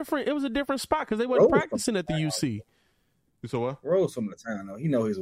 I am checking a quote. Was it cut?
no; 0 cuts

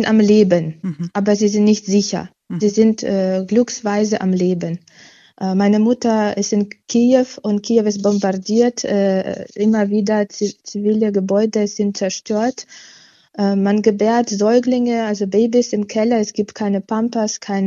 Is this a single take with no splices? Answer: yes; 0 cuts

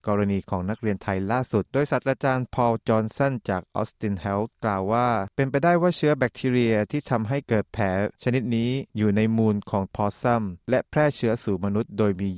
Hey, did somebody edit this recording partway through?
yes; 2 cuts; at 1.6 s, 8.9 s

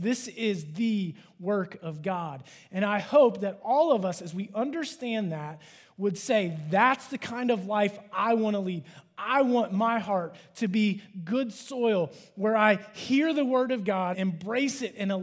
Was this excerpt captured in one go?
no; 1 cut; at 14.1 s

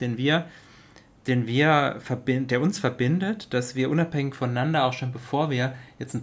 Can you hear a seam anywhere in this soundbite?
no; 0 cuts

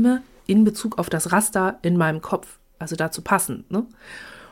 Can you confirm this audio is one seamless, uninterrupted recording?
yes; 0 cuts

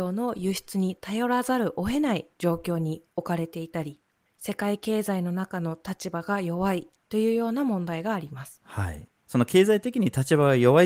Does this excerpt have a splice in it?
no; 0 cuts

